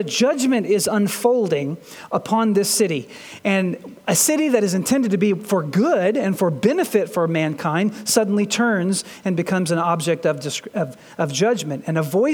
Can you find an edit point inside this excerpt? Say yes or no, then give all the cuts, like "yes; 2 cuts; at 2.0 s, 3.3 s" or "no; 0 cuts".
no; 0 cuts